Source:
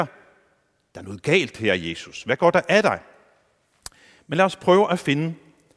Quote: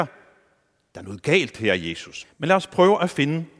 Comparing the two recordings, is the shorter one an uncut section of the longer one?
no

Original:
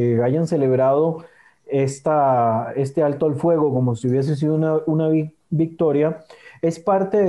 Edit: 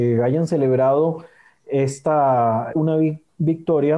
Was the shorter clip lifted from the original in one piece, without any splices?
no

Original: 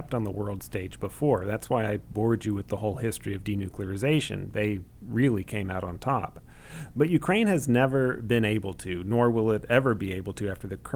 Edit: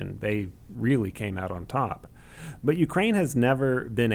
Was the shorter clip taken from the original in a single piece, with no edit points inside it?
yes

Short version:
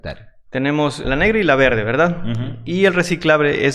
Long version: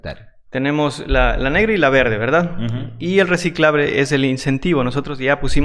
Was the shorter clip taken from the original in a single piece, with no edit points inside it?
no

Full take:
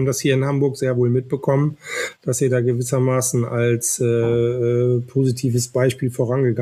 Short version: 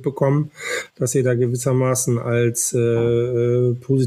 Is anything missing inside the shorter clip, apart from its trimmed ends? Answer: no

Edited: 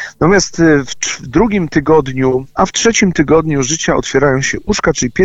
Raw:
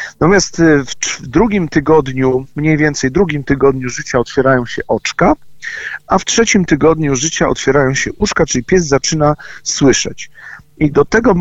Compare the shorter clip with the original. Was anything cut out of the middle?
yes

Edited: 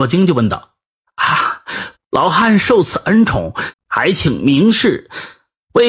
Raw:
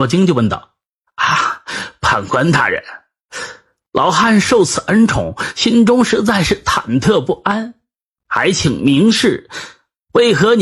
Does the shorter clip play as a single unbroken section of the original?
no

